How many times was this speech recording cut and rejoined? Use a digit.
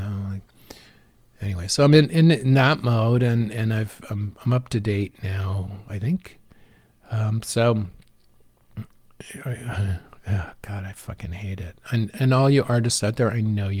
0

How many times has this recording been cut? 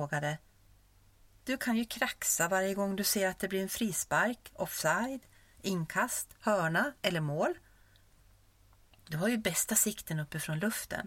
1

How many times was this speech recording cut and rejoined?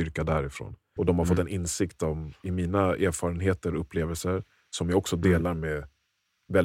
2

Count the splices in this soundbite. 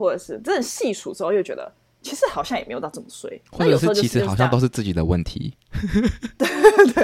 1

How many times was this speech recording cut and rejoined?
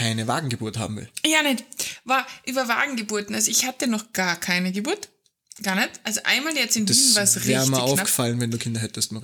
0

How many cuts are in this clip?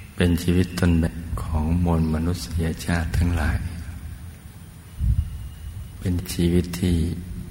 1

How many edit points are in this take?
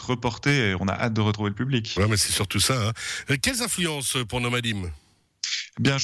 0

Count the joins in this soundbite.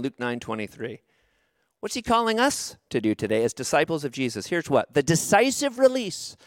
0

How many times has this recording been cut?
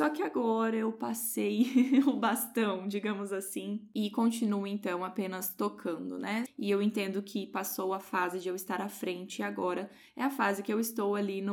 1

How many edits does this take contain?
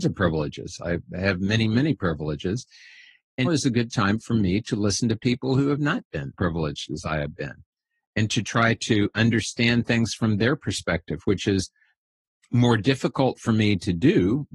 2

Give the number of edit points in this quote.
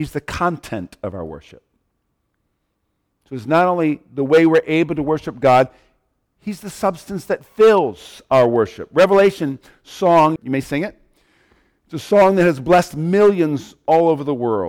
1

